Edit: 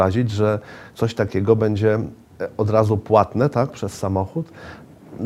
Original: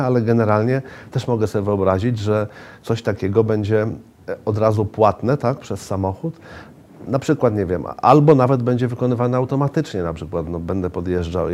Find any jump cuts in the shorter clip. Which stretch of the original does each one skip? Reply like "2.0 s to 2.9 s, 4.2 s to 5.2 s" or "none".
none